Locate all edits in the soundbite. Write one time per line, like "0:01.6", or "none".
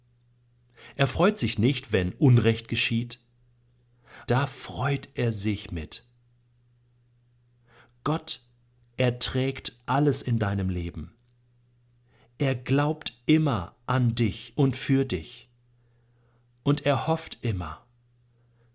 0:04.3